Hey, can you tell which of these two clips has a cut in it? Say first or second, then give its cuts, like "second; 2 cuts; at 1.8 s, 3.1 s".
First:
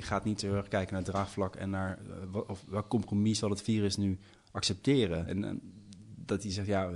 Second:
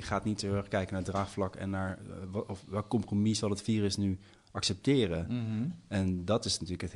first; 1 cut; at 5.3 s